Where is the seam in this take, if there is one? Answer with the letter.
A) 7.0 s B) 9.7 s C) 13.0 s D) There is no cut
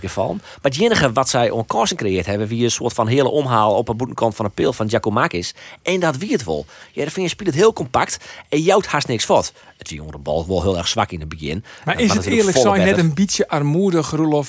D